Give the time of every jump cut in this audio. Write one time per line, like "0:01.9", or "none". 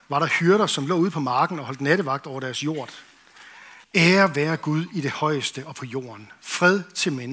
0:03.8